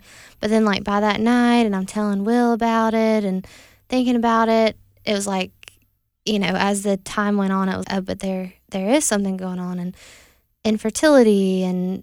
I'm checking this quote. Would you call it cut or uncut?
cut